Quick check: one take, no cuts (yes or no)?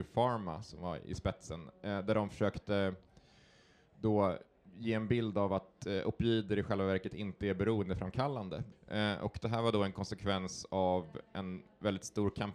no